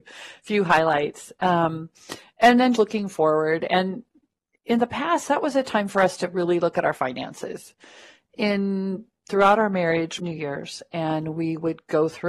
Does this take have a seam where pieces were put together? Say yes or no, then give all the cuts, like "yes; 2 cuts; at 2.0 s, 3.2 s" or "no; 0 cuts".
yes; 2 cuts; at 2.8 s, 10.2 s